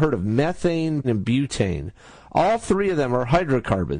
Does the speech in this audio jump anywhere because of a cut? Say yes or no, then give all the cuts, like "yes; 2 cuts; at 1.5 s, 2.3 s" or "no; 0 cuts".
yes; 1 cut; at 1.0 s